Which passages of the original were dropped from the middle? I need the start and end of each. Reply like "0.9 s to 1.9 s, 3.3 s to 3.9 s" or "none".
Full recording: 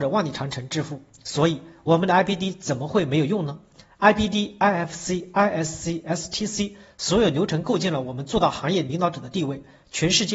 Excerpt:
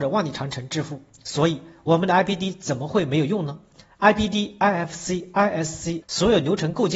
6.0 s to 6.9 s